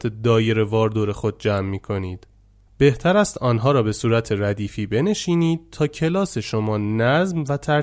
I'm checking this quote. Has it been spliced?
no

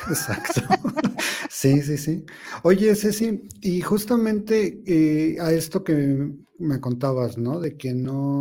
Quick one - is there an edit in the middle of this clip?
no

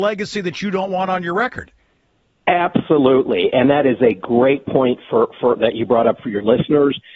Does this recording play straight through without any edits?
yes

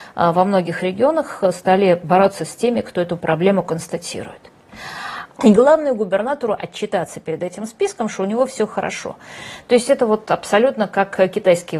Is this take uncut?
no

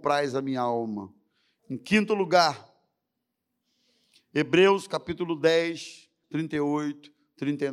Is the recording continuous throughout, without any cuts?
no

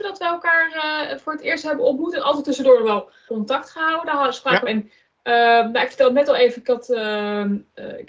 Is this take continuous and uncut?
no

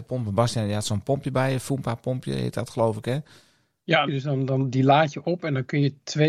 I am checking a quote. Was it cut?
yes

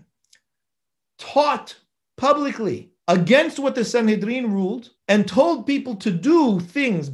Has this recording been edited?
yes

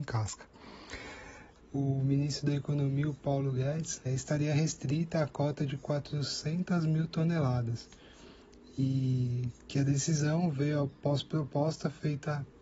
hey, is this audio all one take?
no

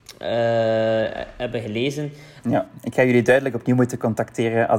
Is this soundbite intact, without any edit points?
no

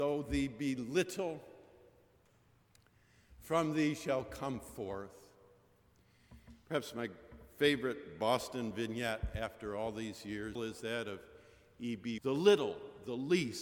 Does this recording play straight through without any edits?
no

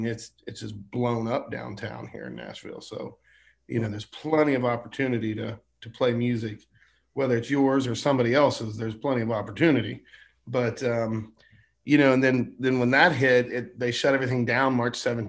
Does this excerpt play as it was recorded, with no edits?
yes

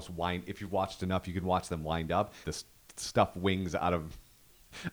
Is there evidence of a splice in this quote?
yes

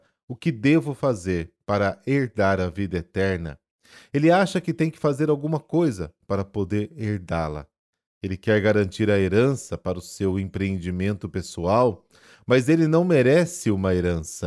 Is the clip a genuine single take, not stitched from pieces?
yes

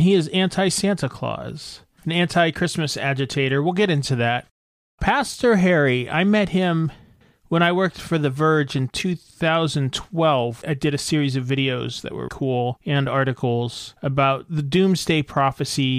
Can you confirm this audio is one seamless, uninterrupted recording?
no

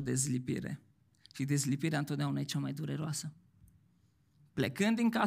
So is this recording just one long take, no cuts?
yes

